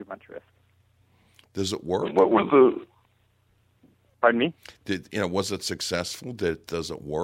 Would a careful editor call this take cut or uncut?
uncut